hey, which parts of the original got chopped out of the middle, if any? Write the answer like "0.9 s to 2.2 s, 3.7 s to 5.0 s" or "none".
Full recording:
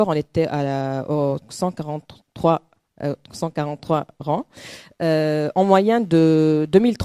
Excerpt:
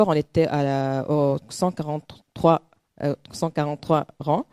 none